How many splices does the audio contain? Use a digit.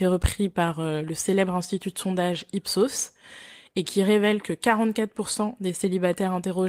0